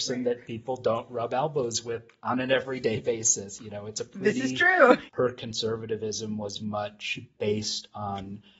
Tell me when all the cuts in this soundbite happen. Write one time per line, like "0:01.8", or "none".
0:05.1
0:06.6